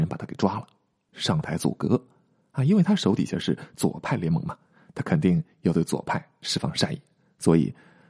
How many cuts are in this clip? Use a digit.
1